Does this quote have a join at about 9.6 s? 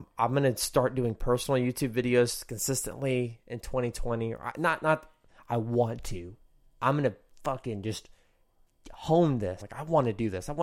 yes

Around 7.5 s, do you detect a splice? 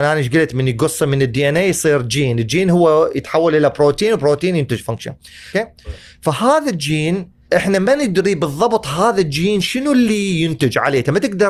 yes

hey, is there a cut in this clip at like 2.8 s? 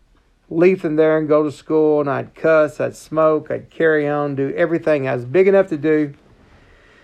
no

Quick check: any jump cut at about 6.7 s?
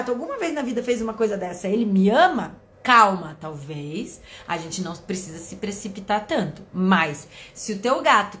no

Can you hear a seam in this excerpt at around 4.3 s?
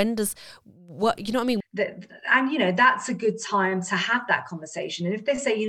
no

